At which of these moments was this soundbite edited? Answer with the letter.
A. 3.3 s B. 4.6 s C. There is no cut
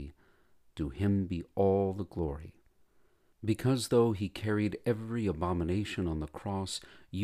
C